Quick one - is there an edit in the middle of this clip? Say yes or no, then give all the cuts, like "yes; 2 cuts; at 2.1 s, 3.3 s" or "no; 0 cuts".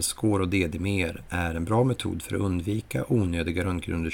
no; 0 cuts